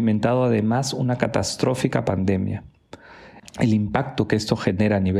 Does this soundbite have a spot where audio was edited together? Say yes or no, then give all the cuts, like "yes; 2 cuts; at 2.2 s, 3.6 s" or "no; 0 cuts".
yes; 1 cut; at 3.4 s